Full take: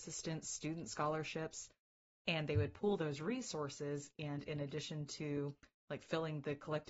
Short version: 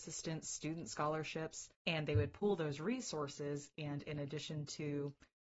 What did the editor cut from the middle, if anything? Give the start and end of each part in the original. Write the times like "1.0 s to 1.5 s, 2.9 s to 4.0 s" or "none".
1.8 s to 2.2 s

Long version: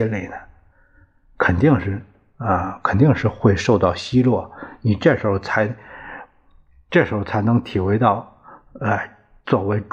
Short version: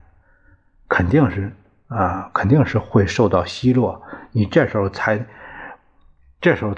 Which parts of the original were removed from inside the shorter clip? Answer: none

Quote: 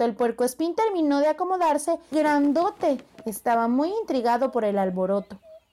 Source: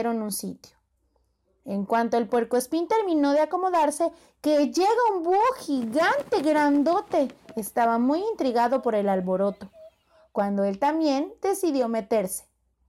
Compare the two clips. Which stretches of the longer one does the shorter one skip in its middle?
4.2 s to 6.4 s

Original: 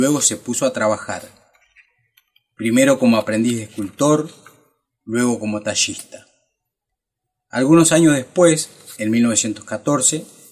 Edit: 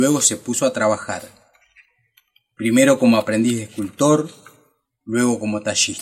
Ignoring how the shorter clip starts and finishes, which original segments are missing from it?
none

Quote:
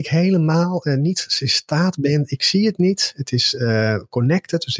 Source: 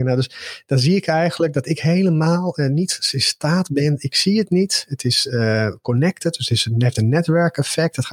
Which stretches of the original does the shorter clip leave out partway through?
none

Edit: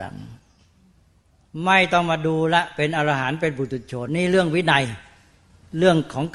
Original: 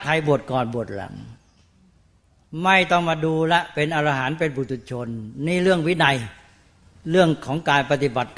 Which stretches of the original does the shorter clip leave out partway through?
5.1 s to 5.4 s

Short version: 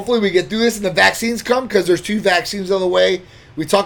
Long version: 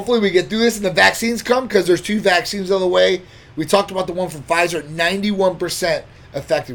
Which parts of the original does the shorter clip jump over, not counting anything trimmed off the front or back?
none

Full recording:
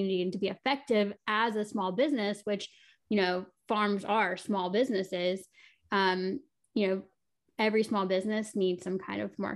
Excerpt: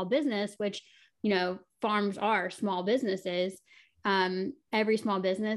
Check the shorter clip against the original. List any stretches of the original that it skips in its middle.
6.5 s to 7.5 s

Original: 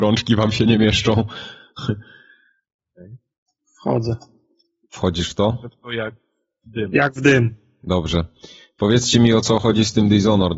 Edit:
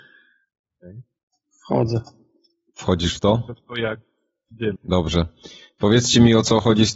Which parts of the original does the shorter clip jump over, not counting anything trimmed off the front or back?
6.9 s to 7.7 s

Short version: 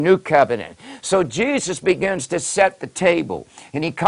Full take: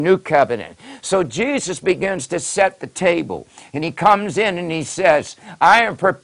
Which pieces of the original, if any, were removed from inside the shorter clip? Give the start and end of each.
none

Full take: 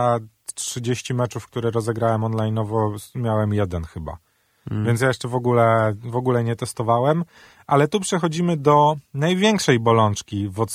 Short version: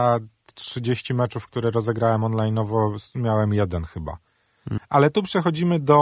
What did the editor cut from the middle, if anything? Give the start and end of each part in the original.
4.8 s to 7.6 s

